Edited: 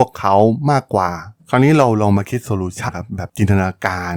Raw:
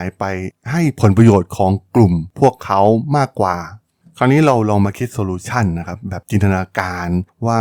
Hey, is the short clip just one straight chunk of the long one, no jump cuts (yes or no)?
no